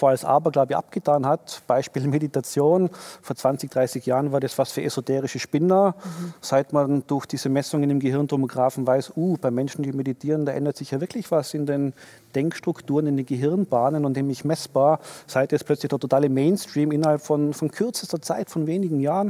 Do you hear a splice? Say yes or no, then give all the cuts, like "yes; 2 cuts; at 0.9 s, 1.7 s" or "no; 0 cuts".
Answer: no; 0 cuts